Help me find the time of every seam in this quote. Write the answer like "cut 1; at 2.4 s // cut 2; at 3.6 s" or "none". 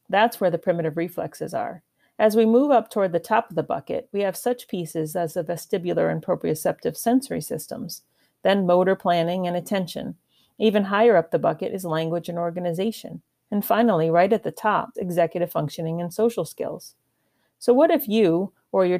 cut 1; at 14.9 s